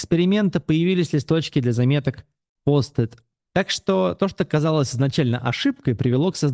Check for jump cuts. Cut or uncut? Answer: cut